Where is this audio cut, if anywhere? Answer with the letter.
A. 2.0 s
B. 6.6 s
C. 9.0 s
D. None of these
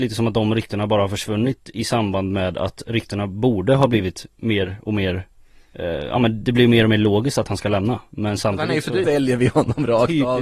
C